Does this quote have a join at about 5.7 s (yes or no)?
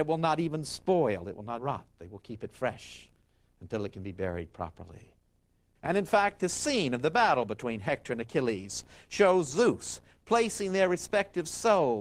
yes